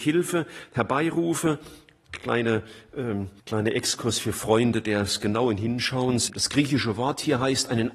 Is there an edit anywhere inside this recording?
yes; 2 cuts; at 3.4 s, 6.3 s

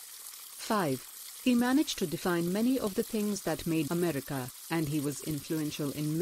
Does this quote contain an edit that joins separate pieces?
yes; 2 cuts; at 1.4 s, 3.9 s

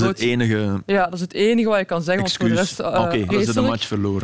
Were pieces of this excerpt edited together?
yes; 1 cut; at 3.3 s

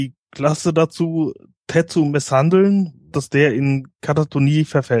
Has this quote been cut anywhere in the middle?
yes; 1 cut; at 3.1 s

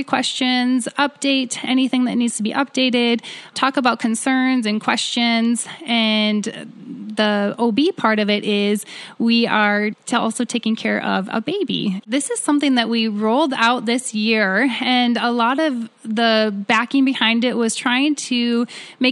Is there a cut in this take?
yes; 1 cut; at 12.0 s

